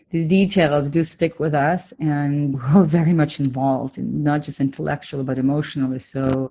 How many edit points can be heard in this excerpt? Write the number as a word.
one